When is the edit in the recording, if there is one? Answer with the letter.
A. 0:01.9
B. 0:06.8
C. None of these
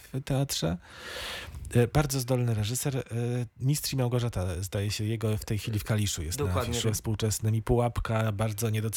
B